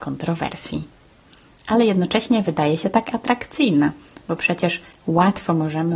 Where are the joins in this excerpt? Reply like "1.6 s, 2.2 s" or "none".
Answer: none